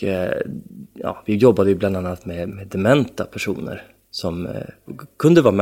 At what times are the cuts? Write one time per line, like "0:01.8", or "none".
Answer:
none

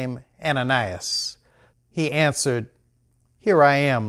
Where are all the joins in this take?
0:01.7

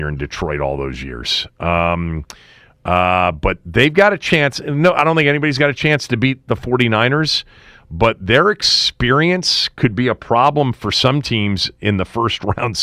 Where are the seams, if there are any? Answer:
none

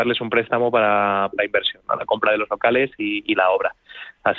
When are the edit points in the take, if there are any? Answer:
0:01.3

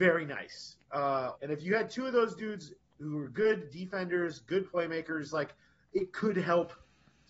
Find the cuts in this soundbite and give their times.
0:01.4

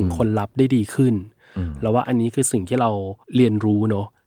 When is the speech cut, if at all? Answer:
0:03.2

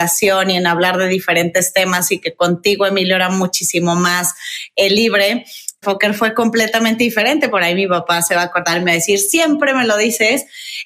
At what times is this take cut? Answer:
0:05.8
0:07.5

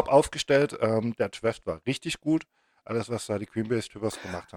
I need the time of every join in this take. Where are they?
0:01.2

